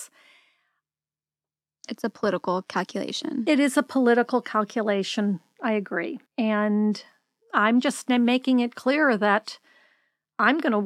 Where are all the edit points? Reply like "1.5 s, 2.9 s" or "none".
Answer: 6.3 s